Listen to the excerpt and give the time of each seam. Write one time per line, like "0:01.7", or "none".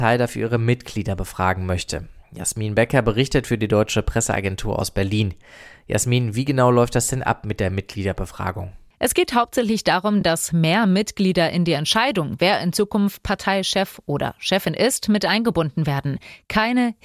none